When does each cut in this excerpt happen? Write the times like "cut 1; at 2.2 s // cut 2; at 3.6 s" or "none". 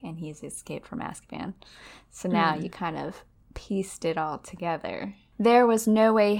cut 1; at 5.3 s